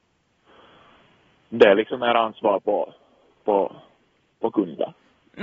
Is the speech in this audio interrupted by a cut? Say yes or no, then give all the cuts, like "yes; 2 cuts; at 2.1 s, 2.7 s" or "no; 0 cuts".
no; 0 cuts